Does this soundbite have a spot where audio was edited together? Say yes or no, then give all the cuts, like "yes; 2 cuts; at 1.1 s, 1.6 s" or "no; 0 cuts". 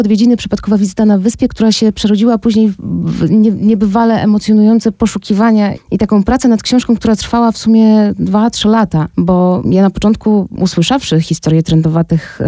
yes; 2 cuts; at 5.7 s, 9.1 s